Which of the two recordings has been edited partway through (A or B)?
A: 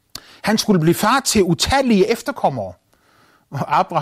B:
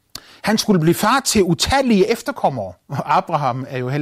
B